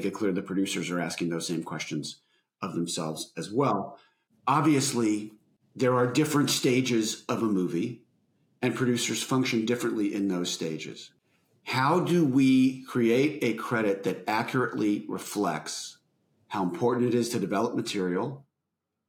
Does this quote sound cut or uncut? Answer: uncut